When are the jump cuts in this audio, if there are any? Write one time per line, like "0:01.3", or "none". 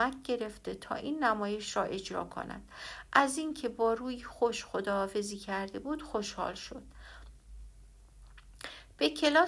none